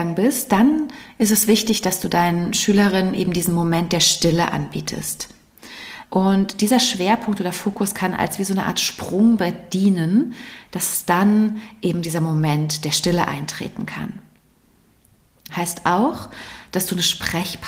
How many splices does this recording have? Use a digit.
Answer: 2